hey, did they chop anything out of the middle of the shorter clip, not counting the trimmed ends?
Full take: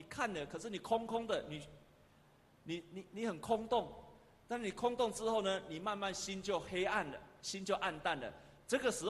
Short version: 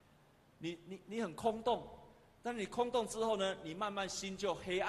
no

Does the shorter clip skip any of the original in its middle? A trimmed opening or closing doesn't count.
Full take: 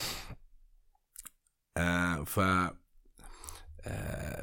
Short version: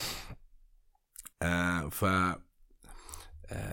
yes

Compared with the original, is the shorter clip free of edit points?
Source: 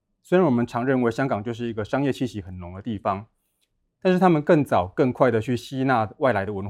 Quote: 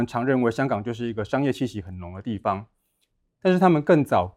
yes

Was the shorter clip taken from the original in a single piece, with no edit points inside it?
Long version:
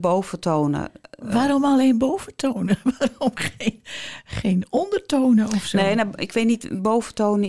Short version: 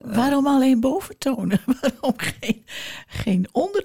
yes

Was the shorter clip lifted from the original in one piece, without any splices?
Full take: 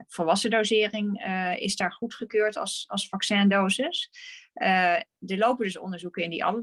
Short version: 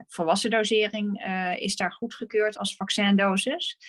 no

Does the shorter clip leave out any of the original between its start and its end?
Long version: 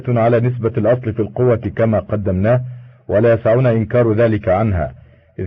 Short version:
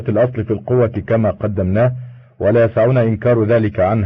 no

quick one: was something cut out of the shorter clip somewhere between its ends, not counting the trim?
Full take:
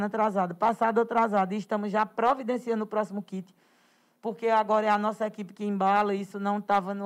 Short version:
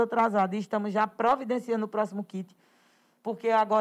no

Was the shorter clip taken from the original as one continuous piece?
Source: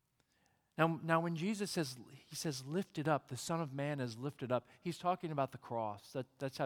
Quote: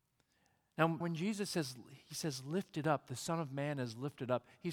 no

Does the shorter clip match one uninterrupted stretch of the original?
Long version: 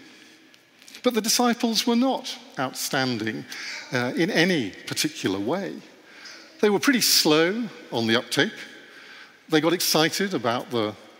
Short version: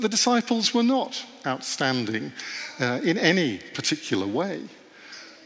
yes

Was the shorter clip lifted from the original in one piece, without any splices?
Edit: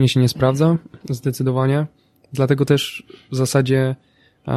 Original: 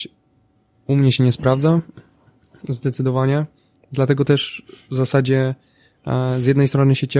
no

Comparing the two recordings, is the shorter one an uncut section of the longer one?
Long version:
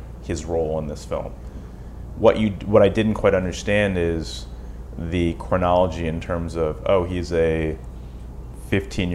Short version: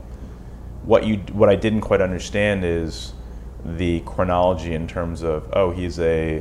yes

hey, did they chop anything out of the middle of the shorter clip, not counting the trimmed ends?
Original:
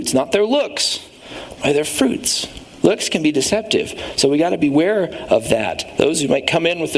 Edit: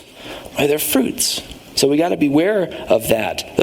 yes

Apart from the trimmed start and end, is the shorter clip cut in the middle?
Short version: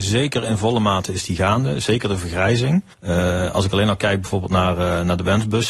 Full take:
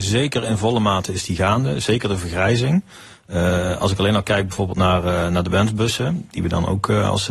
yes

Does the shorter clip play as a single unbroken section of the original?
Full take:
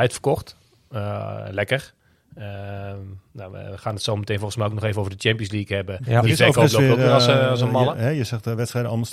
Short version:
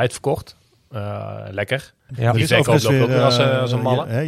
no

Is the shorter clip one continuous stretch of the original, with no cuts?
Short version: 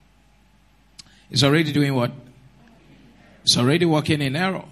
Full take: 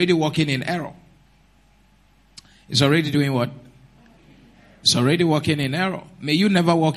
yes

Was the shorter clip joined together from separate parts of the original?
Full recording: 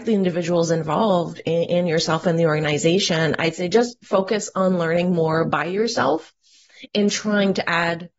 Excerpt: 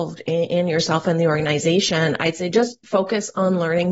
no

